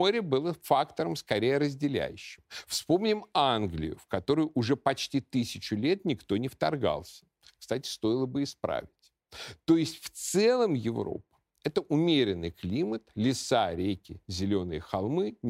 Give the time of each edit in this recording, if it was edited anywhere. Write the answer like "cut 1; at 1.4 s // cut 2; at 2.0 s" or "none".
none